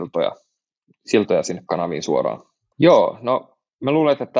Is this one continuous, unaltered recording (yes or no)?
no